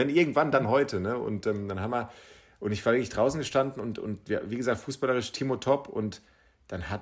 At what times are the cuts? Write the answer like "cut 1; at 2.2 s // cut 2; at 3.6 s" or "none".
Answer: none